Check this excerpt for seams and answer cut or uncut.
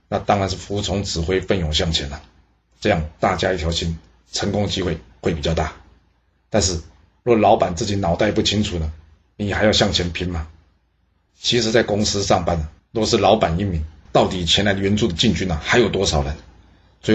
cut